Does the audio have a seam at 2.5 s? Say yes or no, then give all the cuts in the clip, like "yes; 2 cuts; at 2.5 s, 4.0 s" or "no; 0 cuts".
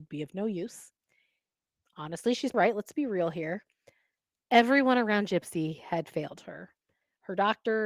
yes; 1 cut; at 2.5 s